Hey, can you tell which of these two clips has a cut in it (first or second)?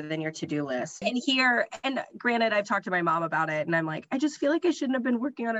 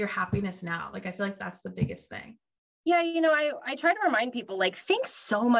first